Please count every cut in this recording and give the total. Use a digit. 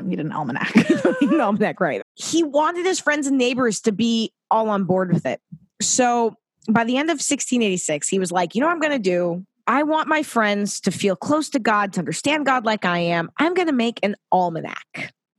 1